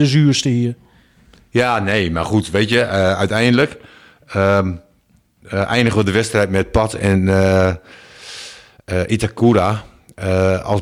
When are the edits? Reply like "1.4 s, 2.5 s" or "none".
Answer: none

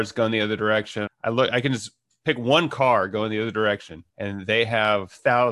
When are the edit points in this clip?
1.1 s, 4.1 s

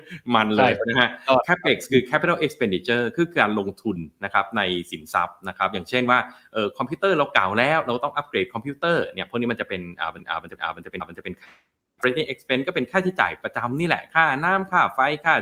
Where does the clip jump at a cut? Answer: none

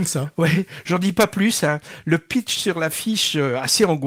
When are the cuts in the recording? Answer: none

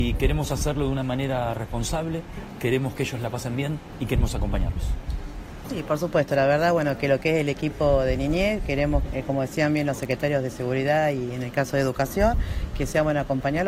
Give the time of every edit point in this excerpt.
5.6 s, 9.1 s

